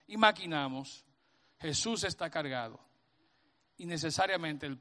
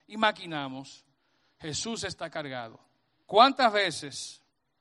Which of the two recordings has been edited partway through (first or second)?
second